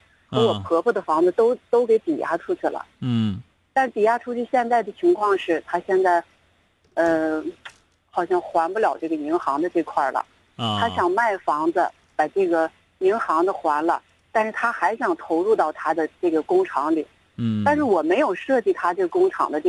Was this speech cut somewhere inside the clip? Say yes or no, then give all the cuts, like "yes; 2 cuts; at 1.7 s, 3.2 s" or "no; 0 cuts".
no; 0 cuts